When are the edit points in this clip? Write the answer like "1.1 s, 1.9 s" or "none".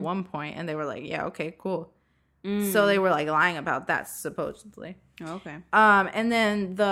none